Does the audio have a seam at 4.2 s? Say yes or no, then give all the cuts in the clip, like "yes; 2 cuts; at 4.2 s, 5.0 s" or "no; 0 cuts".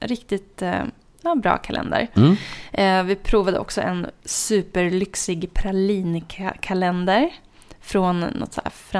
yes; 1 cut; at 4.2 s